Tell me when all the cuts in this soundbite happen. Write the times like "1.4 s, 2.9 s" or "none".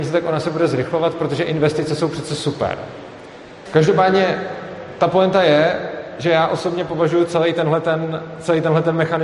3.7 s